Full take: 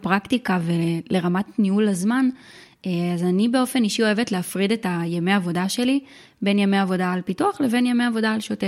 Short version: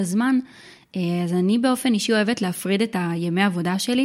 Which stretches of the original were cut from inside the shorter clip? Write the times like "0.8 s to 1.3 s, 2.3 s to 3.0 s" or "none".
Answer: none

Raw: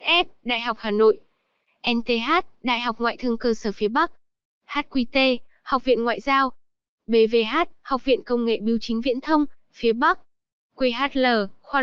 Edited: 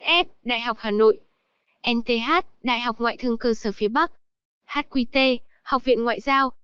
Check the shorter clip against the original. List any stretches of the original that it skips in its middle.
none

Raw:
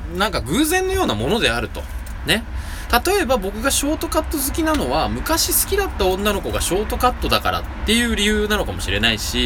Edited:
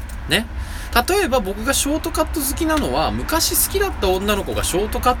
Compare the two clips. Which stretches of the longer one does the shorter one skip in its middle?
none

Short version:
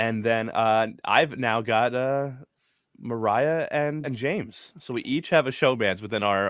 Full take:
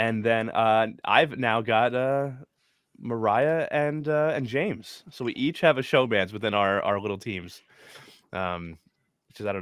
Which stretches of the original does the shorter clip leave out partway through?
4.0 s to 4.3 s

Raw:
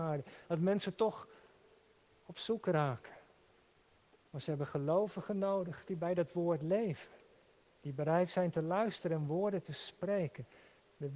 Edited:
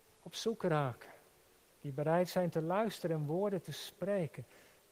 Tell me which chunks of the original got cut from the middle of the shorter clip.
3.7 s to 7.7 s

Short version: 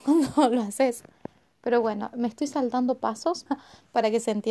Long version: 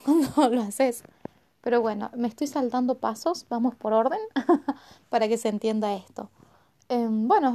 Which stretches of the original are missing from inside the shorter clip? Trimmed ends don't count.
3.5 s to 4.6 s

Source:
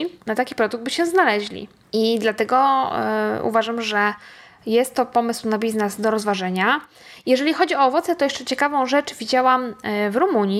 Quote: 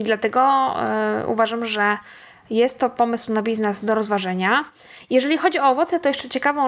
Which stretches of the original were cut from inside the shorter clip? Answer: none

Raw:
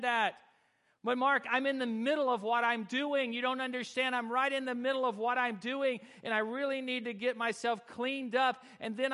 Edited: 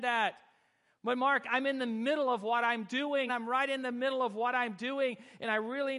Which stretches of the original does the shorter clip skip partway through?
3.3 s to 4.1 s

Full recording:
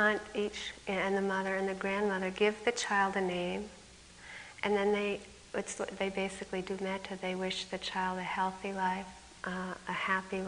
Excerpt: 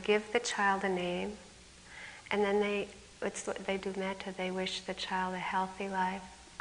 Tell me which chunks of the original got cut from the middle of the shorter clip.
6.1 s to 6.6 s

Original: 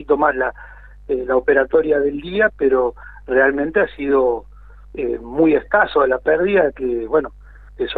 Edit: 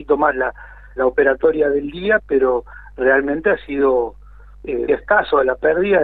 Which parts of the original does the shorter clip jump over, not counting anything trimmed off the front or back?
1.0 s to 1.3 s, 5.2 s to 5.5 s

